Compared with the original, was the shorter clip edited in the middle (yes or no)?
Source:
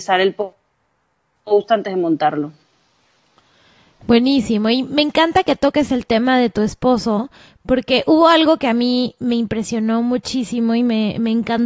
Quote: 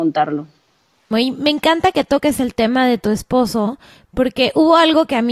yes